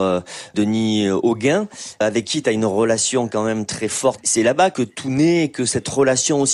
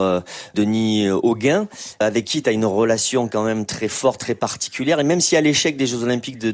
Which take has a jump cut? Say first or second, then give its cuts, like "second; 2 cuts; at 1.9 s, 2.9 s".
first; 1 cut; at 4.2 s